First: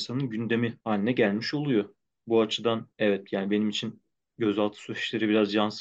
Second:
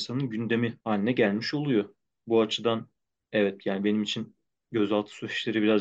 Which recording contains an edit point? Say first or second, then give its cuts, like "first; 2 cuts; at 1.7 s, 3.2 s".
first; 1 cut; at 2.9 s